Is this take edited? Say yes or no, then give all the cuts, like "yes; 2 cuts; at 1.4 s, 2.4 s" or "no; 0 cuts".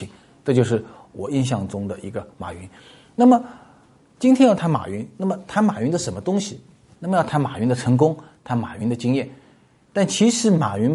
no; 0 cuts